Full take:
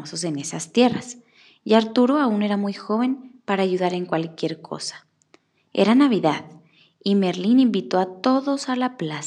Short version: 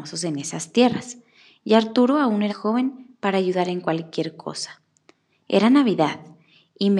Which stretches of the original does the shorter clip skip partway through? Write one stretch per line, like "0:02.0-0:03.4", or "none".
0:02.5-0:02.7

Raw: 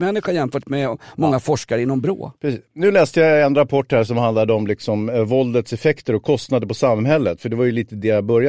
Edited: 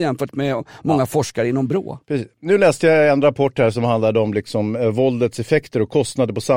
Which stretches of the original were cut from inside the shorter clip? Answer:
none

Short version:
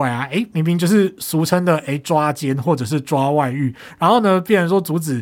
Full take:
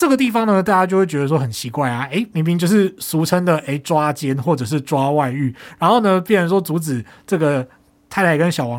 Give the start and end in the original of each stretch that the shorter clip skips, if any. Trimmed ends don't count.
none

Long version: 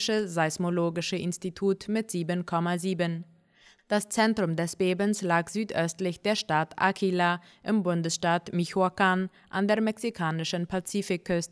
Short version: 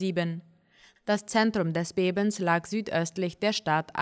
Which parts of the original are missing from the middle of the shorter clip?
none

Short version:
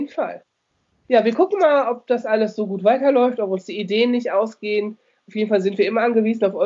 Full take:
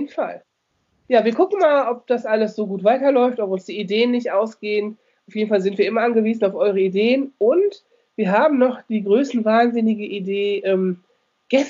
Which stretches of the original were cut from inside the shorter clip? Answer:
none

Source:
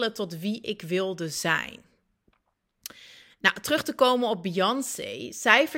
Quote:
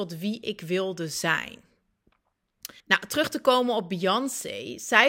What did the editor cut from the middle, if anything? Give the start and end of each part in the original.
0:03.0-0:03.3

